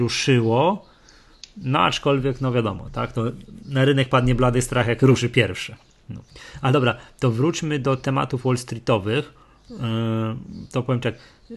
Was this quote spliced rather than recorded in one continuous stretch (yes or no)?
no